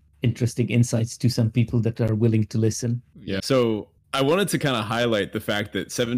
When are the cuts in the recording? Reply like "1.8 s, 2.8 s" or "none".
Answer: 3.4 s